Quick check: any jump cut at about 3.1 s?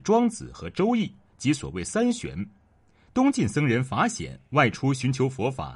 yes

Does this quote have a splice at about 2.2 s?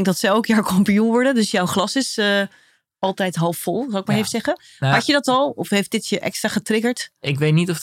no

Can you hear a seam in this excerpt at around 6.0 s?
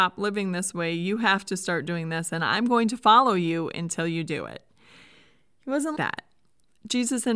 yes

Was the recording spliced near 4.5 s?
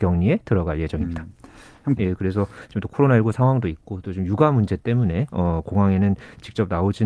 no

